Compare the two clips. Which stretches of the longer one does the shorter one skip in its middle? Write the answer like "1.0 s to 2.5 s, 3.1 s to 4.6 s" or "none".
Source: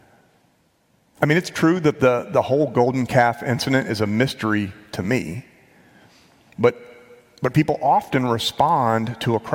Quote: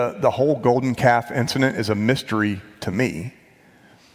none